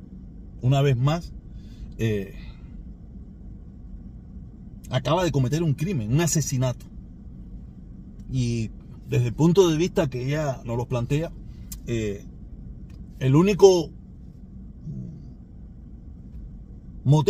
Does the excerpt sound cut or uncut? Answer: uncut